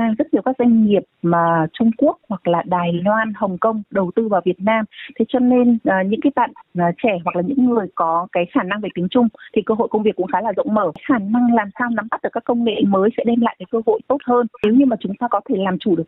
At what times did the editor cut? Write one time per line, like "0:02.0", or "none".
none